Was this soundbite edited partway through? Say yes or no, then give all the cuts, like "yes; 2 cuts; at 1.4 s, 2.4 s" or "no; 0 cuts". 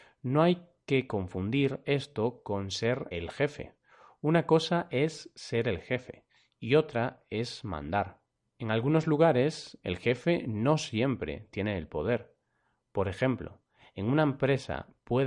yes; 1 cut; at 3.1 s